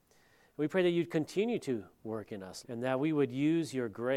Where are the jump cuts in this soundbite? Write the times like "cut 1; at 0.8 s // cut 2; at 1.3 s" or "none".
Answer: cut 1; at 2.6 s